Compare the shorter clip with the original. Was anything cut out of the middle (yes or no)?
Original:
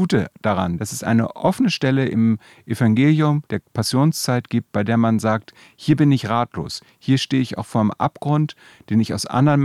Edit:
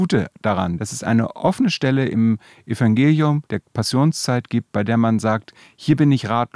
no